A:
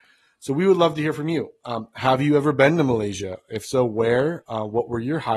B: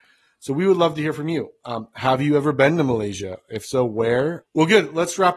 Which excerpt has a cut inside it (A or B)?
B